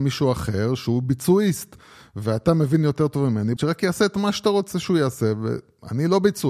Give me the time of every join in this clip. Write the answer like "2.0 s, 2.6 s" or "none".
3.6 s